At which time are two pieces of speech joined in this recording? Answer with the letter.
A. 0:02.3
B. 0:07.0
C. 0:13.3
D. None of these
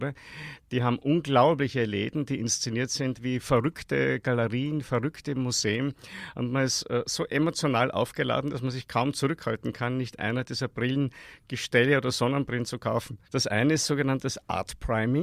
C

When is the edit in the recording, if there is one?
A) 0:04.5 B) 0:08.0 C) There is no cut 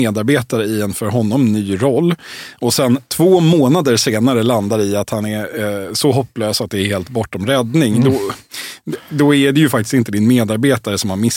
C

